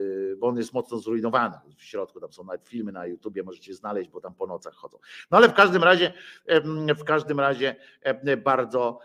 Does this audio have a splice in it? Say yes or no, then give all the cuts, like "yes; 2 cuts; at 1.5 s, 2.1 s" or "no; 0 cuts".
no; 0 cuts